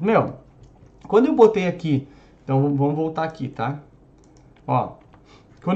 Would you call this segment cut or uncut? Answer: uncut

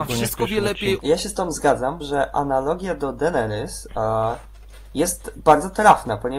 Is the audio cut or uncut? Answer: cut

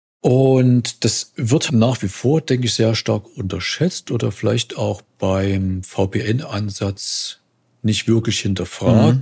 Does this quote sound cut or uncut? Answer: cut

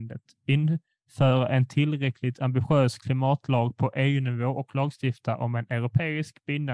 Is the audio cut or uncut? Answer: uncut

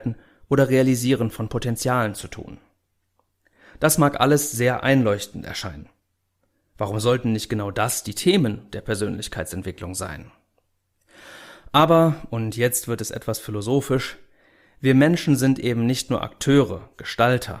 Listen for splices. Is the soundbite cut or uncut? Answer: uncut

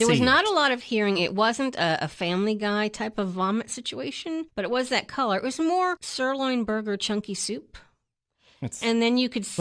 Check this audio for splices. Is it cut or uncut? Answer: uncut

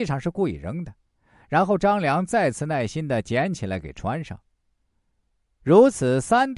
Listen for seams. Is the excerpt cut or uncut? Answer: uncut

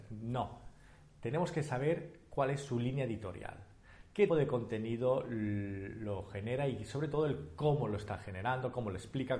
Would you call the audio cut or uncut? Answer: cut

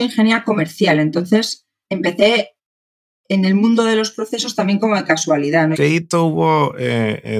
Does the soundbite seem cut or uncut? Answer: cut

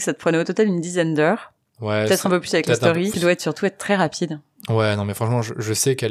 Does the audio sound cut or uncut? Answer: cut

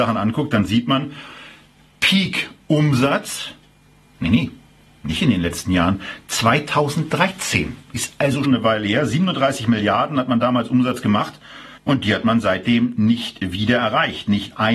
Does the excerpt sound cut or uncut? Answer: cut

